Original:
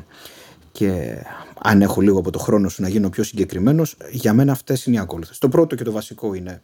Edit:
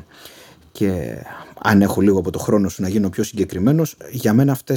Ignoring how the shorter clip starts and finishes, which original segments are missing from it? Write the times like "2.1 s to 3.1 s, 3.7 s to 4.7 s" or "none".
none